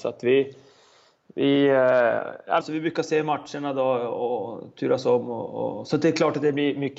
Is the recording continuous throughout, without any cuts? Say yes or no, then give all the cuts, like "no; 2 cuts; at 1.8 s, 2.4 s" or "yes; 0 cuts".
no; 1 cut; at 2.6 s